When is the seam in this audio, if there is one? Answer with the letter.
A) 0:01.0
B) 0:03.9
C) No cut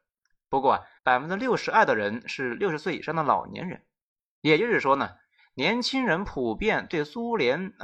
A